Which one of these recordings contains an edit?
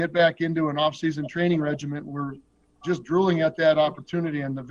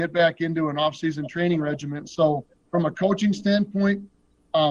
second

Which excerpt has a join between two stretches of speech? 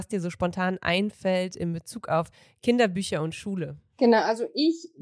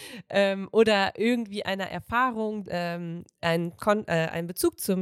second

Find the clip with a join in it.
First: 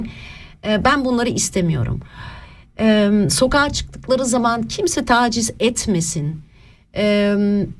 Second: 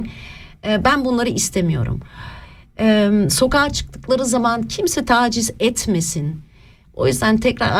second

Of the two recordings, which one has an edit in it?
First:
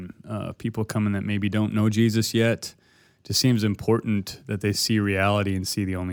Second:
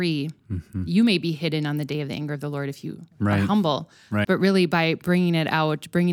second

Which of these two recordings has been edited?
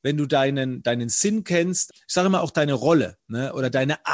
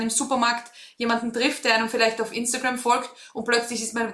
first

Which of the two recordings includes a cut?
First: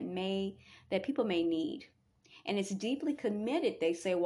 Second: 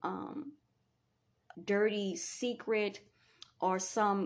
second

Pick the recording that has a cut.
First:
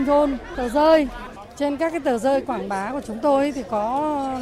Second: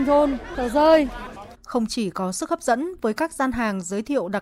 second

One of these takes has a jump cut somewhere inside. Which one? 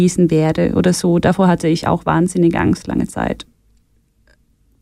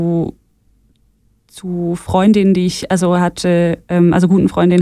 first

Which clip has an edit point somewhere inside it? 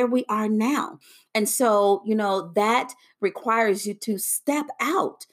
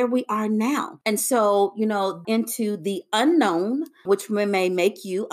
second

